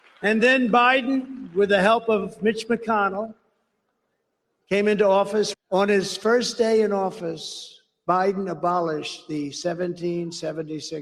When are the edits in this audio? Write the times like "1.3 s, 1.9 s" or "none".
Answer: 5.5 s